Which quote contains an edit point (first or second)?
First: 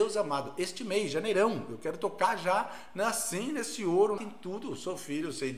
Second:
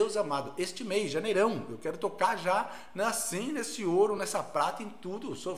first